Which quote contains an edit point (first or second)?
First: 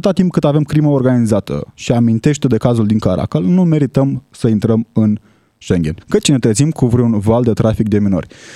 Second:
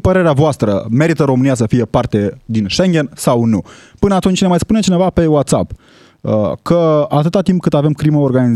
first